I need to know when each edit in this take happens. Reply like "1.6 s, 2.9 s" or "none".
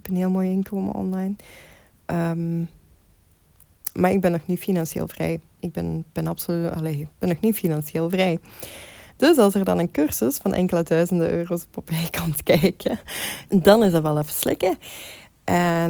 5.6 s, 7.1 s, 13.5 s